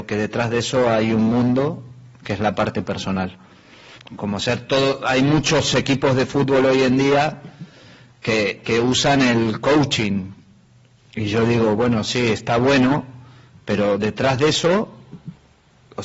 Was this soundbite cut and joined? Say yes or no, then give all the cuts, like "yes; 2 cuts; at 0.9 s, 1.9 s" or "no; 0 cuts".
yes; 1 cut; at 4.0 s